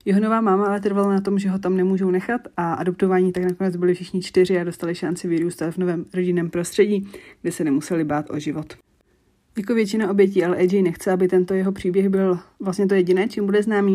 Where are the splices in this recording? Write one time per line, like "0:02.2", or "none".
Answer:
none